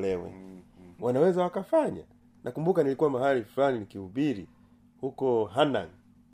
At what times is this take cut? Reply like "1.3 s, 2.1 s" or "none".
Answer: 1.0 s